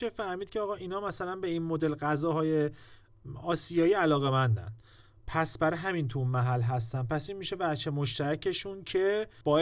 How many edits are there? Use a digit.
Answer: 0